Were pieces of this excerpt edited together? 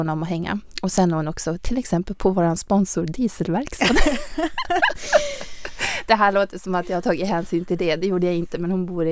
no; 0 cuts

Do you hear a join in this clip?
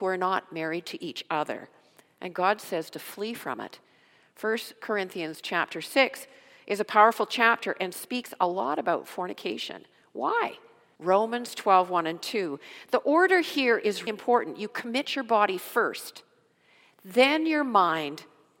yes; 2 cuts; at 11.0 s, 14.1 s

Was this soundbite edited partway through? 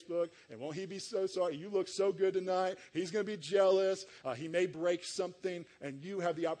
yes; 1 cut; at 4.2 s

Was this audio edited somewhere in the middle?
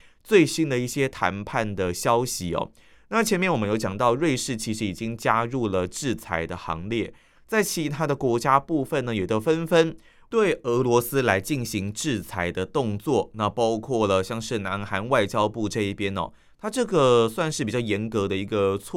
no; 0 cuts

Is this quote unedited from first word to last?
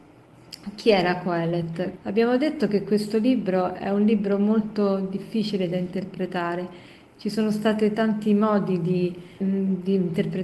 no; 2 cuts; at 2.0 s, 9.4 s

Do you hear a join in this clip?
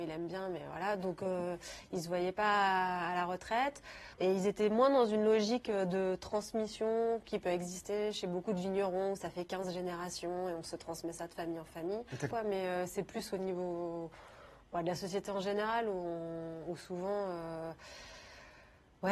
yes; 2 cuts; at 4.1 s, 12.3 s

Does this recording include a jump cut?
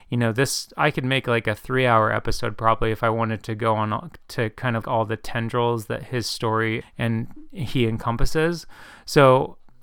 yes; 2 cuts; at 4.8 s, 6.8 s

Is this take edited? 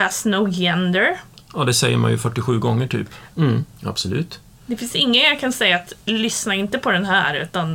yes; 1 cut; at 3.3 s

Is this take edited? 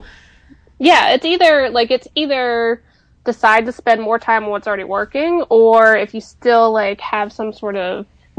no; 0 cuts

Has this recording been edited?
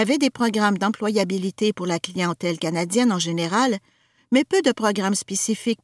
no; 0 cuts

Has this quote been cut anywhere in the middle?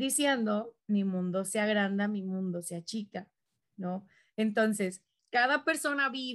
yes; 1 cut; at 5.2 s

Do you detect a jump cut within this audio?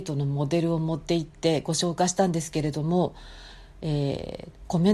no; 0 cuts

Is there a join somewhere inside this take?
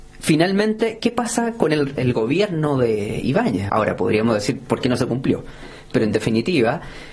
yes; 1 cut; at 3.7 s

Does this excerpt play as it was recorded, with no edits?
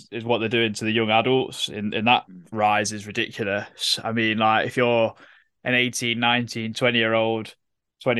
yes; 0 cuts

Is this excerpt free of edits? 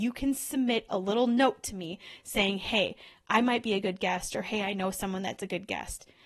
yes; 0 cuts

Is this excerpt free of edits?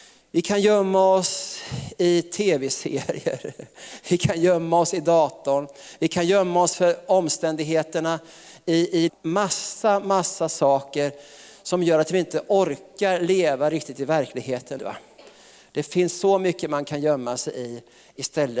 no; 2 cuts; at 9.1 s, 14.8 s

